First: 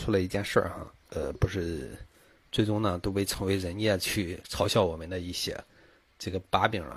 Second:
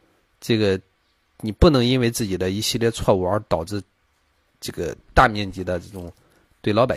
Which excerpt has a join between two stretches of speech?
first; 1 cut; at 1.0 s

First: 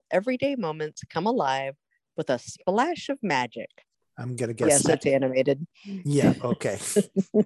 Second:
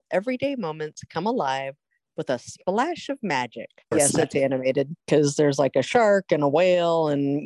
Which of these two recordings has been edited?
second; 2 cuts; at 3.9 s, 5.0 s

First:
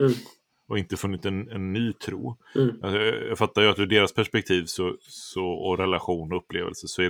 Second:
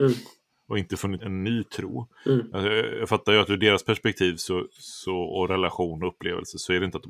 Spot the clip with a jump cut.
second; 1 cut; at 1.2 s

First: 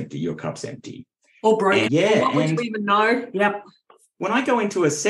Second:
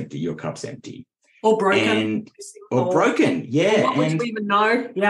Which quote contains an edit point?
first; 1 cut; at 1.8 s

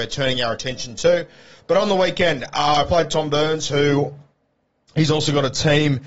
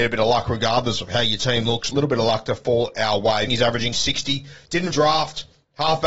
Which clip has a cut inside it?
second; 3 cuts; at 1.9 s, 3.5 s, 4.9 s

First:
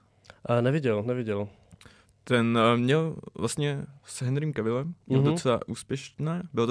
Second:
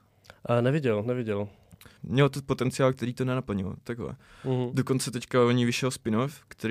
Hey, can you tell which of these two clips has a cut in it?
second; 1 cut; at 2.0 s

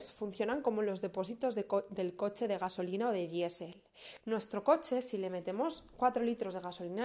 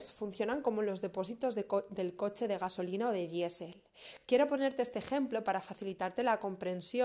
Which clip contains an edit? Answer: first; 1 cut; at 4.2 s

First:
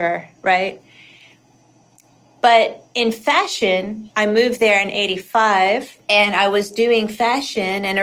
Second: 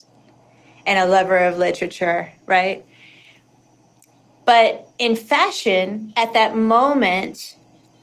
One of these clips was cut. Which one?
first; 2 cuts; at 4.1 s, 6.0 s

